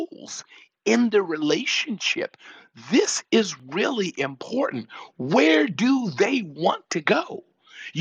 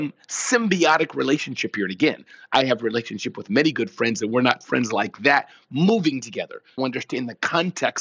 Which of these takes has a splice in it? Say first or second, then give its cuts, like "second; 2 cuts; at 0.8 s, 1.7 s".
second; 1 cut; at 6.8 s